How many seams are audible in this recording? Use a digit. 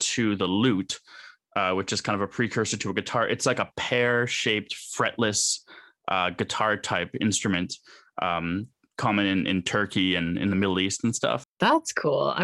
1